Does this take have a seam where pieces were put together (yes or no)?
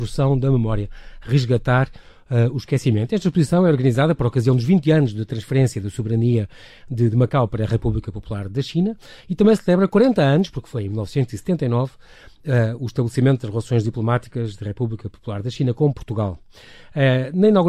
no